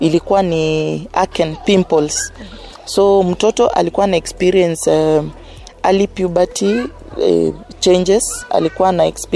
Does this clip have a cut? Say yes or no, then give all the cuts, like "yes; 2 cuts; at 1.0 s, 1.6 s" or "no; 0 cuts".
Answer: no; 0 cuts